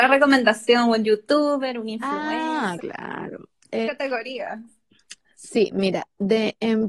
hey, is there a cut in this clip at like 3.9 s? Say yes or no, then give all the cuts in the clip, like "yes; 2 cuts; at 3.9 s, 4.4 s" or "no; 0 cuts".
yes; 2 cuts; at 2.8 s, 3.9 s